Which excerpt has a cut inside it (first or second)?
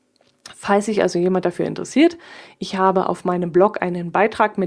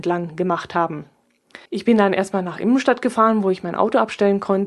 second